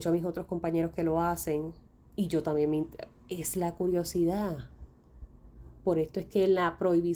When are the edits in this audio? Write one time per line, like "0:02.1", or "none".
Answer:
none